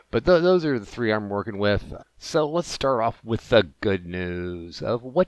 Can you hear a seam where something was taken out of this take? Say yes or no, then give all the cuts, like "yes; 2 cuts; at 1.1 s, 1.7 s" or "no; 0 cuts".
yes; 1 cut; at 2.0 s